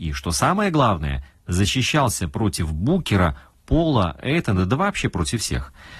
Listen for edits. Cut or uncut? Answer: uncut